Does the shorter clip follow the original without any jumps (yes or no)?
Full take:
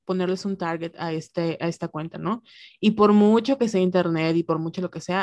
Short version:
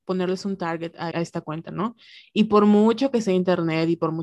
no